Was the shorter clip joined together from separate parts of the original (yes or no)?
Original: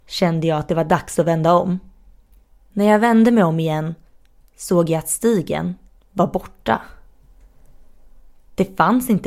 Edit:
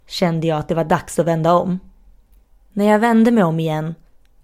no